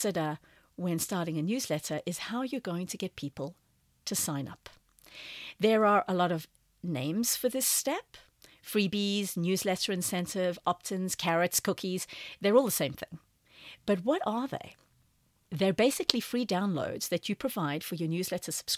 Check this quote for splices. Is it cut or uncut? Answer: uncut